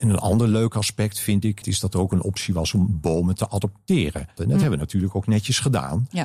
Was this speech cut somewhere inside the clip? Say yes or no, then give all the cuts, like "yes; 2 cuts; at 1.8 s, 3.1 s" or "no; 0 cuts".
yes; 2 cuts; at 1.6 s, 4.4 s